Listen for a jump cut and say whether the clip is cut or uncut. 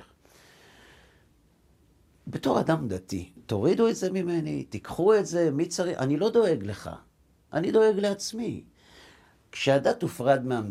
cut